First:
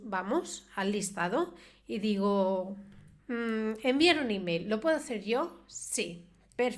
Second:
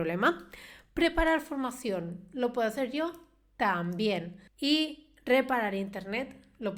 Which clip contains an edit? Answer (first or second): second